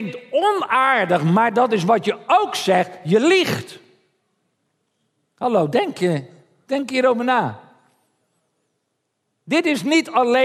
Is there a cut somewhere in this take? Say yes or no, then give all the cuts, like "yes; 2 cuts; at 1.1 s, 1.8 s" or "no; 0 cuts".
no; 0 cuts